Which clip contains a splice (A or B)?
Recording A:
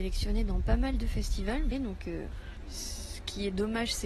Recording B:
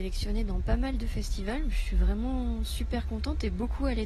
A